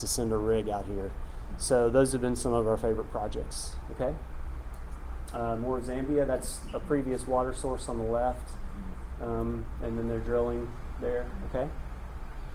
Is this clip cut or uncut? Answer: uncut